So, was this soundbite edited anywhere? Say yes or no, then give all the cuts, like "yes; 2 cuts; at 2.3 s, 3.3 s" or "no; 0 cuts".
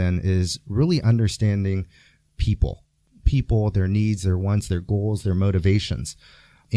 no; 0 cuts